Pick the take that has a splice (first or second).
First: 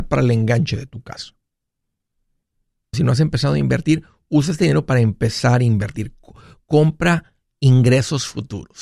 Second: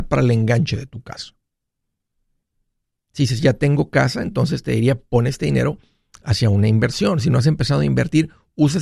first